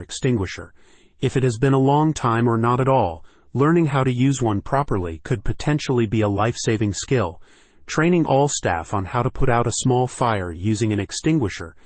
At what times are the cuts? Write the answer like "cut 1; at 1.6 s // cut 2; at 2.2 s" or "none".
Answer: none